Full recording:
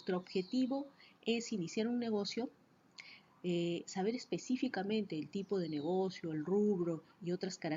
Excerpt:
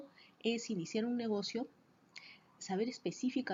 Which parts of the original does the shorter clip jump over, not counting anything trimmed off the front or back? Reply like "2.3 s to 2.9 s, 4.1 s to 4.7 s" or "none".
3.4 s to 3.8 s